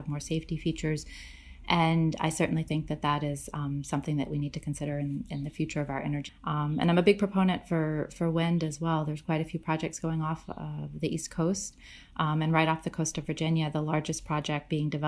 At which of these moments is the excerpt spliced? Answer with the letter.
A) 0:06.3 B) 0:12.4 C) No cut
A